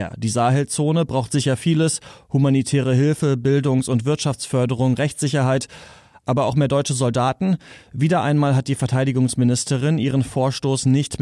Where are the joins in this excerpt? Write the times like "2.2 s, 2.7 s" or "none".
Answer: none